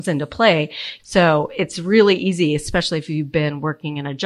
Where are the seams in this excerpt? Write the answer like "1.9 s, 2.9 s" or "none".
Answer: 1.0 s